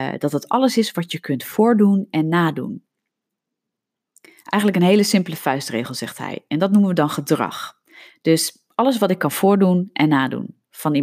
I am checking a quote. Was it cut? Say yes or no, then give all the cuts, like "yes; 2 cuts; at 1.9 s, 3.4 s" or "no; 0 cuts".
no; 0 cuts